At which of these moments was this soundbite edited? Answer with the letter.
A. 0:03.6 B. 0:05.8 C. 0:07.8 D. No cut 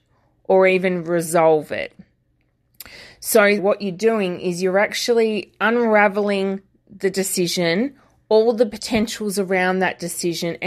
A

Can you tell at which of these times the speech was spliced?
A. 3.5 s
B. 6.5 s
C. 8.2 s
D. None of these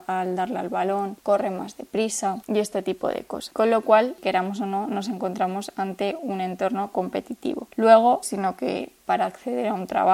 C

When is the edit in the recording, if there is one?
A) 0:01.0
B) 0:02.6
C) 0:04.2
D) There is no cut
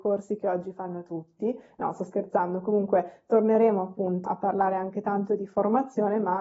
C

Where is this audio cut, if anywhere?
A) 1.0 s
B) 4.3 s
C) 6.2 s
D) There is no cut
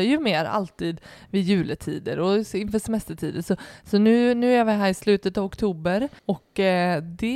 C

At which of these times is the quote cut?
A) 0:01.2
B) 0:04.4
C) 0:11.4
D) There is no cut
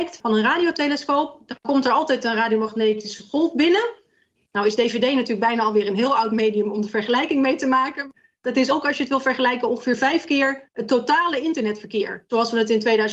B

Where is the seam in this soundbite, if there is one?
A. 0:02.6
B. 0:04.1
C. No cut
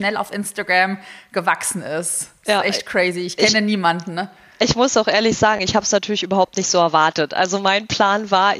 C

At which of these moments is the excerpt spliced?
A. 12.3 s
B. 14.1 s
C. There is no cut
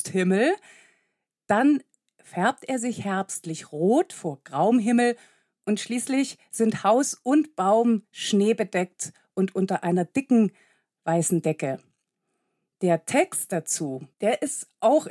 B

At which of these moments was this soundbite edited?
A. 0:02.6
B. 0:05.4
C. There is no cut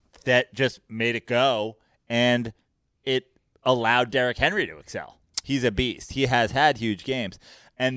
B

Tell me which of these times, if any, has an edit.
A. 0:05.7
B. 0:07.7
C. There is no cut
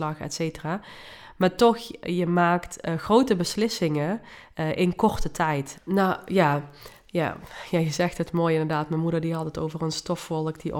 A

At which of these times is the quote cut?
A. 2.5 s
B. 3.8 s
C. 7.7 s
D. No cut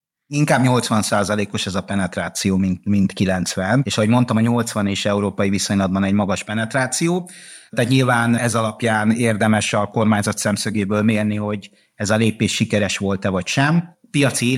C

